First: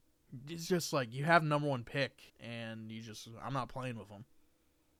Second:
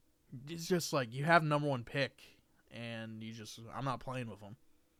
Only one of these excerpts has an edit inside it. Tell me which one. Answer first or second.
first